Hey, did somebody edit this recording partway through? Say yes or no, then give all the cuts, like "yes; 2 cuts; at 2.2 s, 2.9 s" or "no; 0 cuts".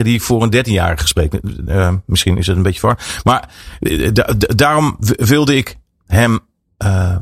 no; 0 cuts